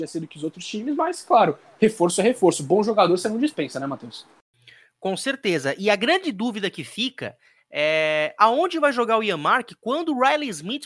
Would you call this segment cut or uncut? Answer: uncut